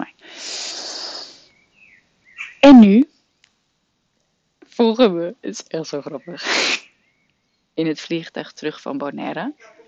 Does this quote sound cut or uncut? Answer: uncut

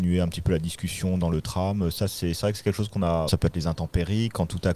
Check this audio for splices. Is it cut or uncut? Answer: cut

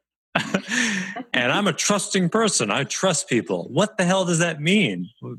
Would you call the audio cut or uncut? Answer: uncut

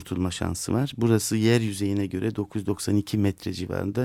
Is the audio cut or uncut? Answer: uncut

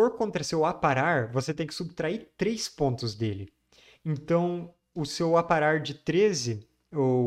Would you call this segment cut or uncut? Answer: uncut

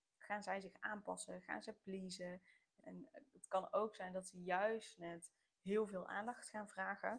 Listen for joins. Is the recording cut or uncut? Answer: cut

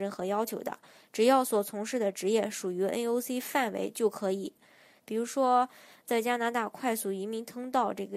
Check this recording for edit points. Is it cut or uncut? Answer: cut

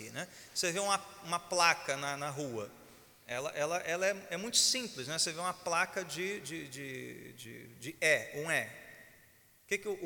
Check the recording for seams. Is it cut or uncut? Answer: uncut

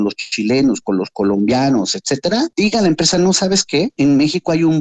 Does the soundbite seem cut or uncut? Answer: uncut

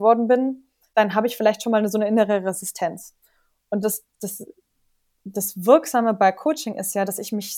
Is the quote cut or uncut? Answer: uncut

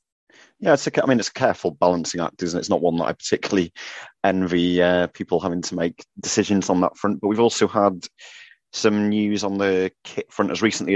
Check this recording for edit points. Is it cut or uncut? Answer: uncut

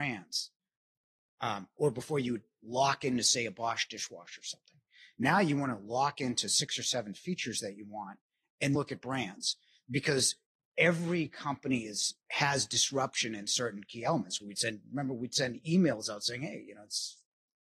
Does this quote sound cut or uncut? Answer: cut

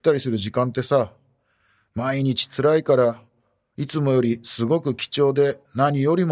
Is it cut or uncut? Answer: uncut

